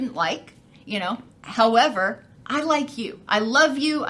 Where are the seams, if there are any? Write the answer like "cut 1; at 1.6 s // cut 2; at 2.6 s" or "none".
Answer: cut 1; at 1.3 s